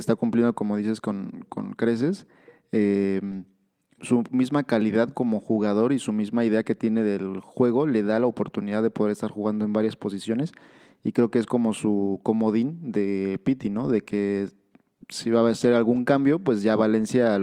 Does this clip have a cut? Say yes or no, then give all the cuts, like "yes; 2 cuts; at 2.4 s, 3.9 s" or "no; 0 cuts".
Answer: yes; 1 cut; at 4.0 s